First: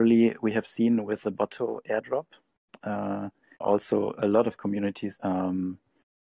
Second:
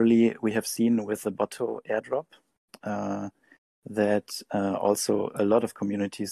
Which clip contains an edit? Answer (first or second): first